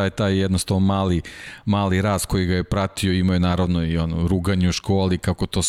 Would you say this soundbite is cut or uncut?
uncut